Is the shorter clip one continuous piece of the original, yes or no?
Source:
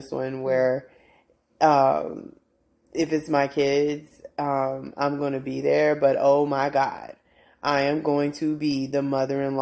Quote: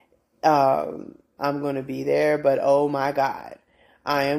no